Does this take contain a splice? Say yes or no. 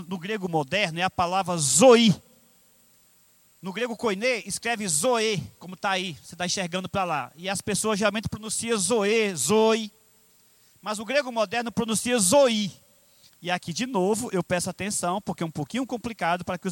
yes